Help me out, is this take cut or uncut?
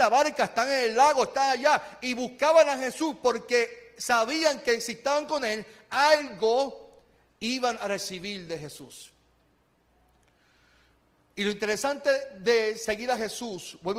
uncut